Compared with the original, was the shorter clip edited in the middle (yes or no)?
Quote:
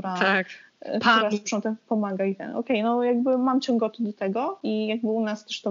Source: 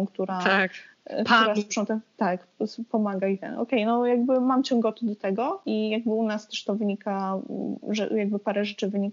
yes